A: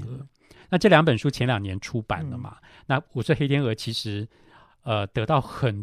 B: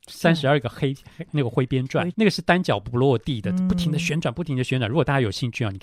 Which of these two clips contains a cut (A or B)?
B